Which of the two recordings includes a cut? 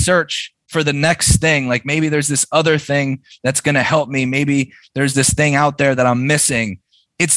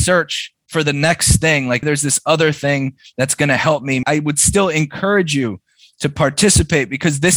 second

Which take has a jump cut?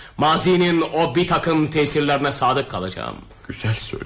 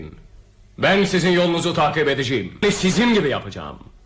second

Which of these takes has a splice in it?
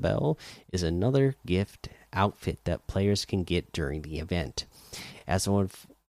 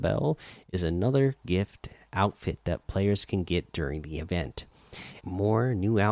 second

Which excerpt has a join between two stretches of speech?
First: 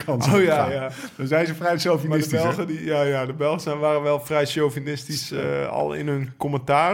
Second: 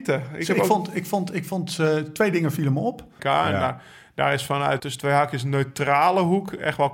second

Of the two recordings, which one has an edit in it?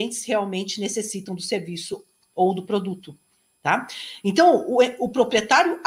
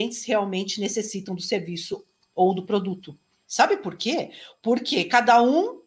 second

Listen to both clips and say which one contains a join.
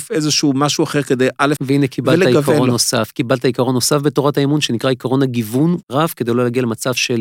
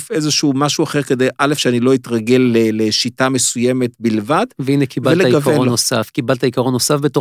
first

